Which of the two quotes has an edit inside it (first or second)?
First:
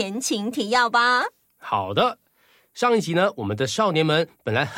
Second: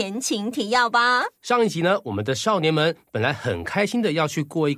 second